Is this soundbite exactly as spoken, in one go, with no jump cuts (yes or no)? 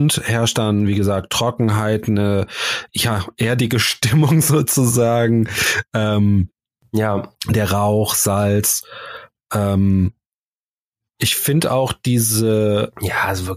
no